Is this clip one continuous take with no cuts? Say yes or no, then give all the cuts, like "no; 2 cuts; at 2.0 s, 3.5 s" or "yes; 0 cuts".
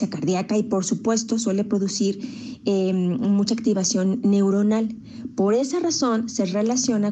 yes; 0 cuts